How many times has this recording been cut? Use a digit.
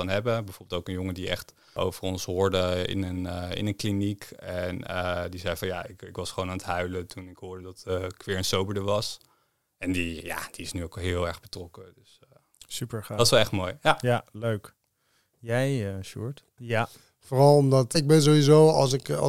2